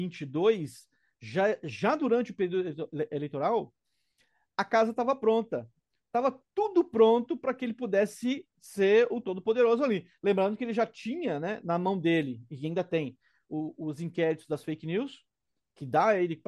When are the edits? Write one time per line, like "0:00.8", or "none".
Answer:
none